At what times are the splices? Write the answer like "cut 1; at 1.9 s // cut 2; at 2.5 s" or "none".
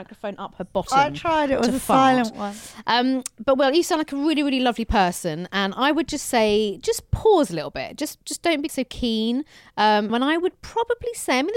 cut 1; at 8.7 s // cut 2; at 10.1 s